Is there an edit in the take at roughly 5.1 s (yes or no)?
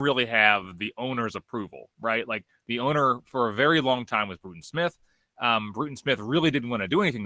no